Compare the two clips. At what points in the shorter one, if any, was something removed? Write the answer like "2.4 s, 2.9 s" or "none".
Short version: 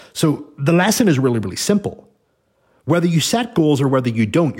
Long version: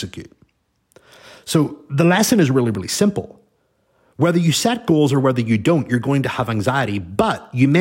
none